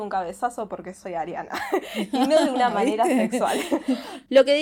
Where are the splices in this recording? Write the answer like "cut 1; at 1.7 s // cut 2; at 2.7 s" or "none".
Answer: none